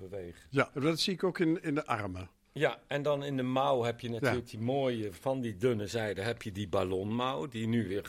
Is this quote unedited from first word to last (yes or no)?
yes